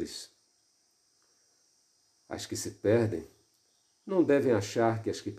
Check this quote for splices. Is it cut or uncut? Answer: uncut